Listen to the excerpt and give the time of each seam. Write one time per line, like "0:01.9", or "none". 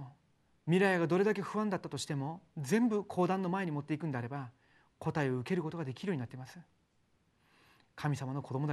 none